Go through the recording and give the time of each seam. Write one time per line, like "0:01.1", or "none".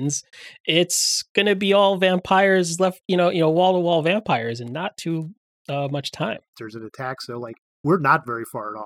0:06.5